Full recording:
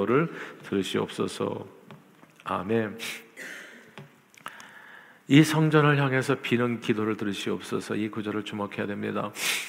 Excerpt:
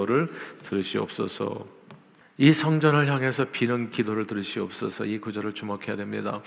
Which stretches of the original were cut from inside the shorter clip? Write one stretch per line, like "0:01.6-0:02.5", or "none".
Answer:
0:02.2-0:05.1